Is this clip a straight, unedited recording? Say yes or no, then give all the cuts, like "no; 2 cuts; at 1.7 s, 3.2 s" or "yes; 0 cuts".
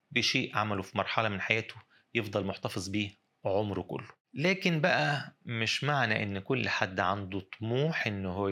no; 1 cut; at 4.2 s